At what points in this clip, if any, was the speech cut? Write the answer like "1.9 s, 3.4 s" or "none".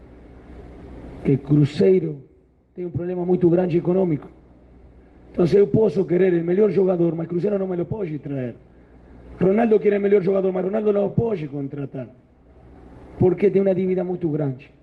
none